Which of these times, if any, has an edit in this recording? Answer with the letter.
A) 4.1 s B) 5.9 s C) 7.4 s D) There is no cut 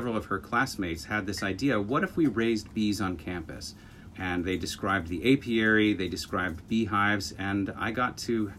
A